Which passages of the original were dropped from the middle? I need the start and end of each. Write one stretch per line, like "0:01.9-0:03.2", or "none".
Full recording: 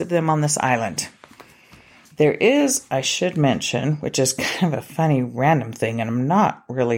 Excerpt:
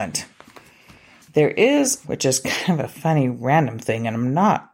0:02.9-0:04.0

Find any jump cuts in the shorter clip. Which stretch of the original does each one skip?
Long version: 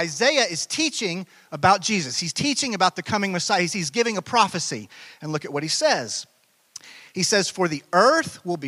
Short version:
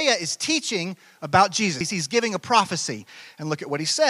0:02.1-0:03.6

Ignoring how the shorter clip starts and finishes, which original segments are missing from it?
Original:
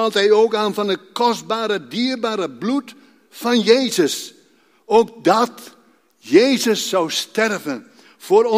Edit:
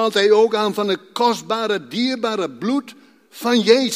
none

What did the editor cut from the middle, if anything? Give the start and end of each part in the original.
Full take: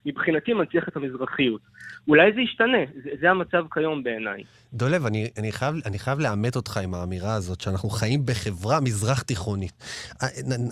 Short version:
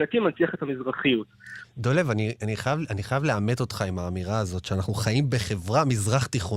0:02.0-0:04.6

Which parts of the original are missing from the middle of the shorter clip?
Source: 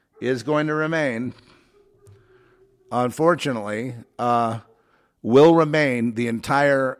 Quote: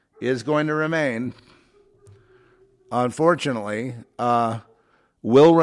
none

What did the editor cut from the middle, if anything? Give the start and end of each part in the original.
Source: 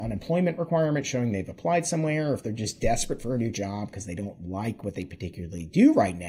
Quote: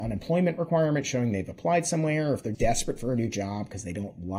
0:02.5-0:02.8

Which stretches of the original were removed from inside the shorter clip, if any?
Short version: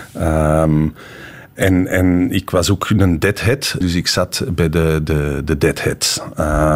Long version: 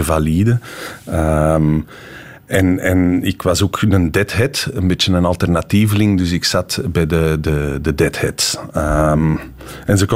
0:04.7-0:06.2

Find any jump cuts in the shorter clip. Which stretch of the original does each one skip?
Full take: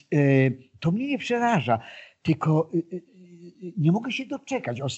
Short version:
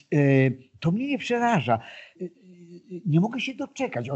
0:02.2-0:02.9

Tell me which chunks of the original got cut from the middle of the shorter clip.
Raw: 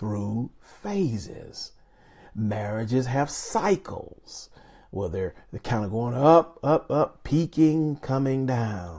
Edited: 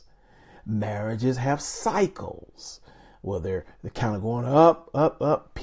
none

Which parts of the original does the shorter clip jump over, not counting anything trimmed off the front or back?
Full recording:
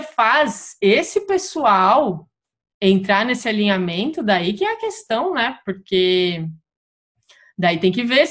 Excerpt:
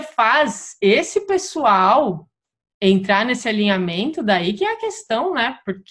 none

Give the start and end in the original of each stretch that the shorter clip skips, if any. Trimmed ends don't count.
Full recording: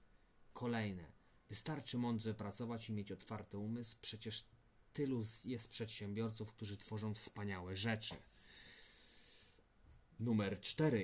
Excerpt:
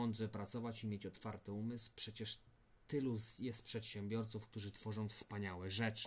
none

